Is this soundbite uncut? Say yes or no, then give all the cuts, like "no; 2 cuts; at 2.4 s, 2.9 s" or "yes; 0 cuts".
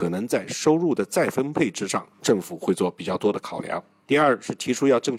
yes; 0 cuts